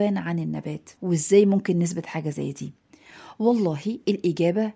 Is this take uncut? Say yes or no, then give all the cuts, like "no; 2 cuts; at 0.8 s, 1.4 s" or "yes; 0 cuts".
no; 1 cut; at 1.0 s